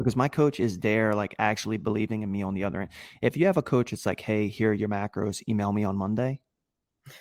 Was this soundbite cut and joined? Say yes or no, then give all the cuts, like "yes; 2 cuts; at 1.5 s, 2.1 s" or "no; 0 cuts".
no; 0 cuts